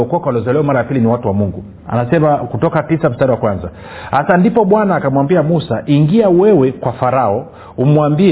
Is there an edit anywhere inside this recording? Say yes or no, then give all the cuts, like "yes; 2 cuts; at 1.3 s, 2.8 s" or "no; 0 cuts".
yes; 1 cut; at 1.8 s